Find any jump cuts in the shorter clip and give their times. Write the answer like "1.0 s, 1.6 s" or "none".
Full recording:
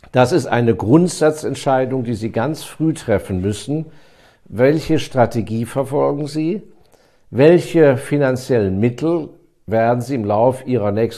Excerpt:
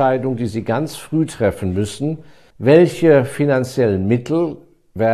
2.5 s